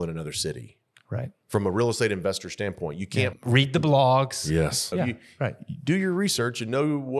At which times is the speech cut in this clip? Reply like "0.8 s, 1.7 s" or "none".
3.3 s, 4.9 s